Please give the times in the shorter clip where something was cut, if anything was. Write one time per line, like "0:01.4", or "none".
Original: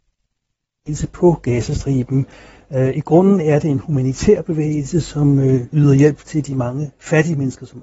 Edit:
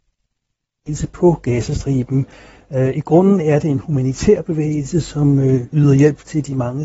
none